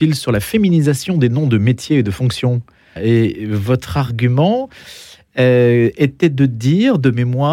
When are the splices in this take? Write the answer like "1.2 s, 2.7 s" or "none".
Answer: 3.0 s